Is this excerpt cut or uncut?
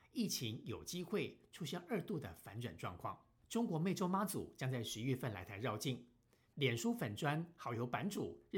cut